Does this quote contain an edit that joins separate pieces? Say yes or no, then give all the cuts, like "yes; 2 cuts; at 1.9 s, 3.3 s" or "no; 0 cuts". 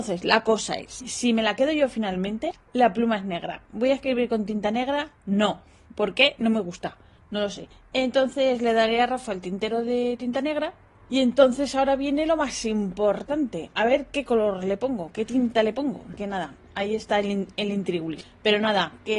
no; 0 cuts